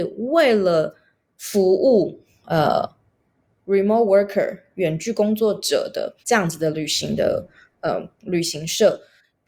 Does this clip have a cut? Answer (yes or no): yes